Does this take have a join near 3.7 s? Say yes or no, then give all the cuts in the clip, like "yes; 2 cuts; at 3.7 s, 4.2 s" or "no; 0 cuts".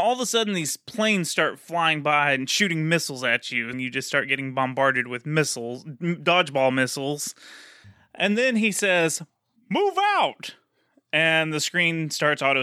yes; 1 cut; at 3.7 s